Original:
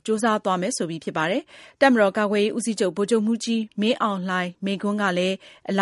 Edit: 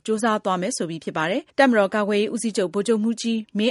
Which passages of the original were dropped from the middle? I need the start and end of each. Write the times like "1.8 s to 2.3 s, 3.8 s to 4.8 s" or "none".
1.5 s to 1.7 s

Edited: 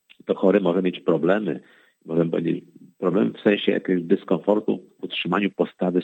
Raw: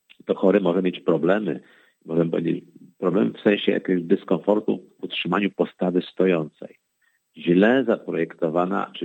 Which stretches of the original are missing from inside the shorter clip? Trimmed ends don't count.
none

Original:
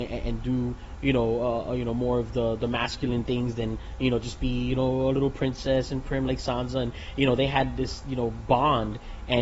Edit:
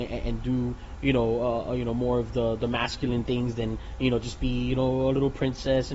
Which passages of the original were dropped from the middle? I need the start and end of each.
none

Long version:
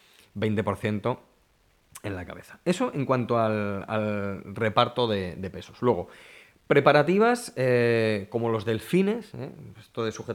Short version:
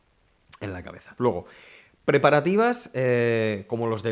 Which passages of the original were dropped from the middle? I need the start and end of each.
2.6 s to 5.8 s

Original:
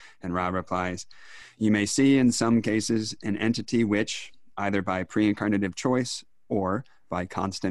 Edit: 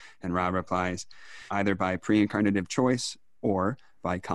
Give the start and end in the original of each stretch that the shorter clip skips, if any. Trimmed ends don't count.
1.5 s to 4.5 s

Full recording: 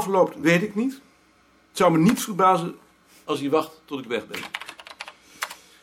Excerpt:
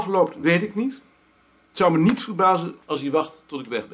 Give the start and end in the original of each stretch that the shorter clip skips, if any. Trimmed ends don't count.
2.8 s to 3.2 s

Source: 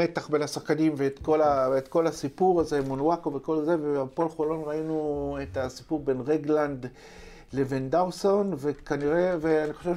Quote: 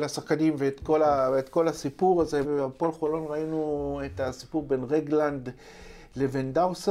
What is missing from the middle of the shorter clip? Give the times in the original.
2.8 s to 3.8 s

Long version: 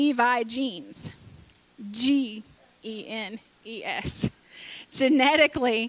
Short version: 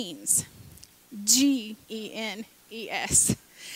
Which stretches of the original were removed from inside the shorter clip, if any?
2.5 s to 2.8 s

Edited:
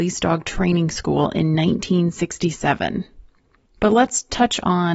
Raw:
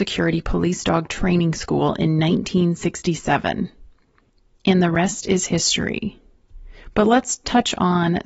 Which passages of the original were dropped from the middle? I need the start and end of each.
4.4 s to 6.9 s

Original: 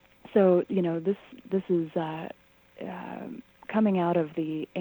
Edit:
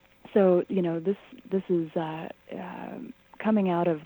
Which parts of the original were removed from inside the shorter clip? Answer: 2.4 s to 2.7 s

